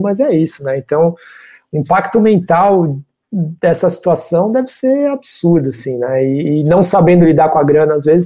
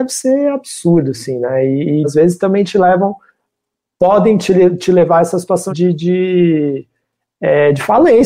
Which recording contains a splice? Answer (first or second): second